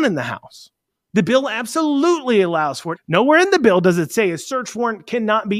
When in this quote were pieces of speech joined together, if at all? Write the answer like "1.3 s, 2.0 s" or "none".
1.1 s, 3.0 s